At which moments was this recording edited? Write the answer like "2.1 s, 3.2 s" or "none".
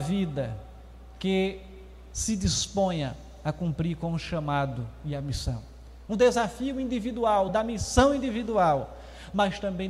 6.1 s, 7.5 s